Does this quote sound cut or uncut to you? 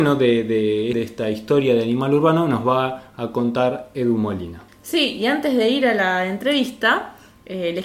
cut